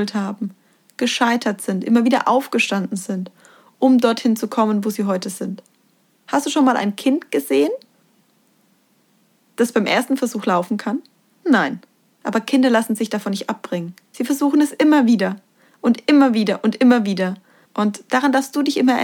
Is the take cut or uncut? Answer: cut